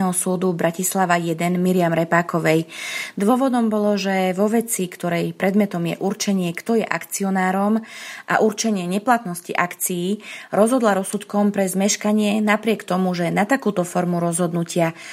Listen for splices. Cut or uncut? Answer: uncut